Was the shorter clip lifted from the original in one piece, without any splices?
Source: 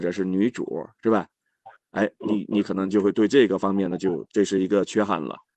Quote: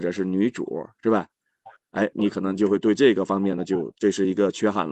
no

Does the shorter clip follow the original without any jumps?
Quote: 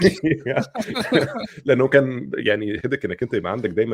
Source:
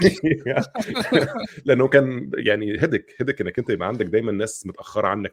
no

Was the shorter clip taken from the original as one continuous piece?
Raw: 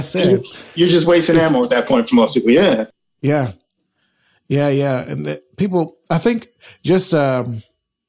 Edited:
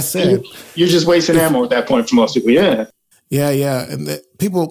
no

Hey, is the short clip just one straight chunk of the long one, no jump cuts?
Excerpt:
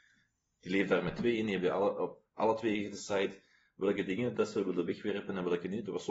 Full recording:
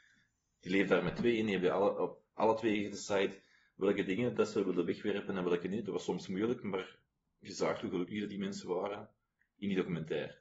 yes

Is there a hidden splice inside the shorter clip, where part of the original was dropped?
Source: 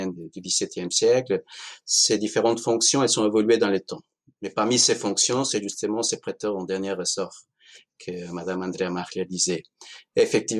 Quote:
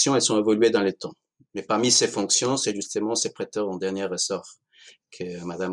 no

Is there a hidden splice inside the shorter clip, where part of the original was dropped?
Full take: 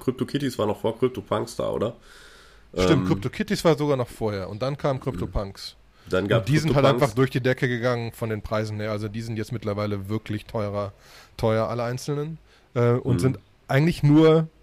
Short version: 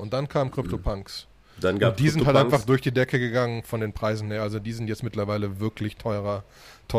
no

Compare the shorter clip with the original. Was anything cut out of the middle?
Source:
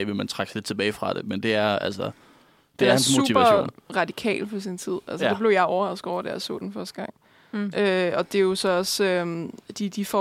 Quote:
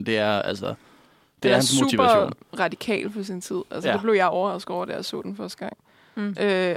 no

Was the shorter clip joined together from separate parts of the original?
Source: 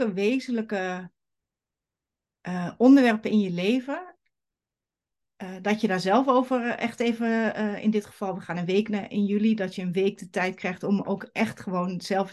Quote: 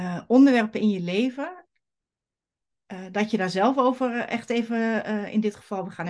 no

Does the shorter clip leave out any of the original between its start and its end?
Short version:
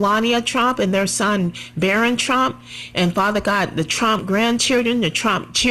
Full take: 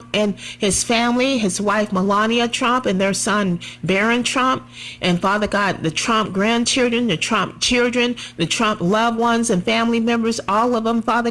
no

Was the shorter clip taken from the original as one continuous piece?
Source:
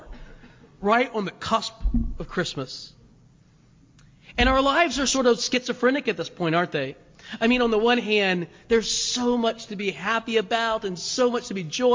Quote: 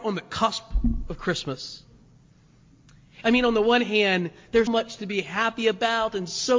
no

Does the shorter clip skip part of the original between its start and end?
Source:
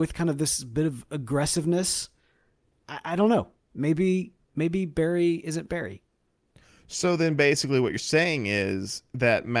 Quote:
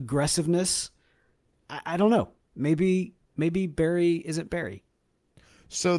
no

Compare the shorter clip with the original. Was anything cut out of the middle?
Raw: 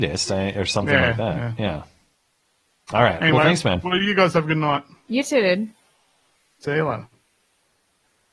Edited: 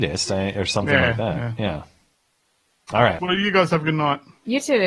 yes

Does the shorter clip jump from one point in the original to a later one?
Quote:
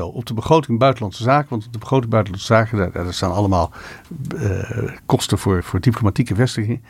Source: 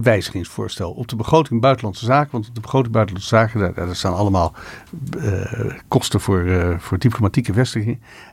yes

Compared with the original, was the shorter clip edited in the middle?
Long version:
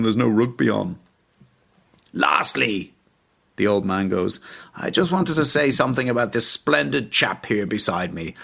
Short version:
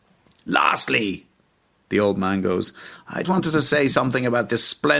yes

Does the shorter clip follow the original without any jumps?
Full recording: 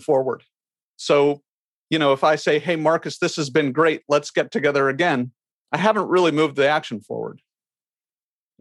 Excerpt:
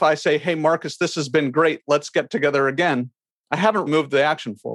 no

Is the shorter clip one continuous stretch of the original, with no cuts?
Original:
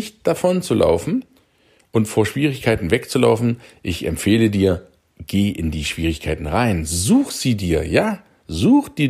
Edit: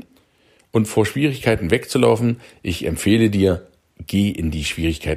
yes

